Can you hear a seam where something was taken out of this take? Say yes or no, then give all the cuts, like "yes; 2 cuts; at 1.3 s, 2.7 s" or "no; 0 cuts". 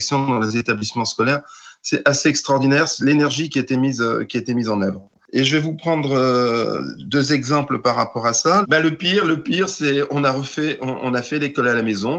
yes; 1 cut; at 8.6 s